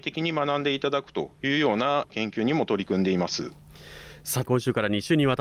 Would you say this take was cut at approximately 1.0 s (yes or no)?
no